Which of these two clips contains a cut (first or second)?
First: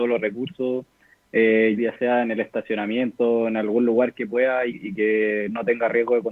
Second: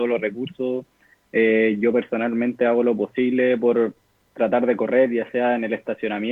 first